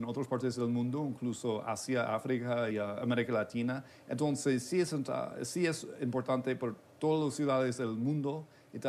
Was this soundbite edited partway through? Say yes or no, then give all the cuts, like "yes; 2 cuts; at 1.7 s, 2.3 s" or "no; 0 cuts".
yes; 1 cut; at 2.7 s